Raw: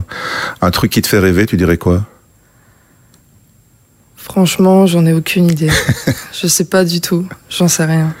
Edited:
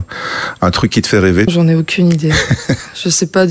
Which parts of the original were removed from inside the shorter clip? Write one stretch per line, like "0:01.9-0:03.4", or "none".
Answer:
0:01.5-0:04.9